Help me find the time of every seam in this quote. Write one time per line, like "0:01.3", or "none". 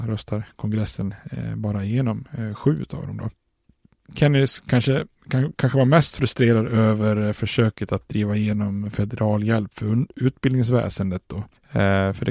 none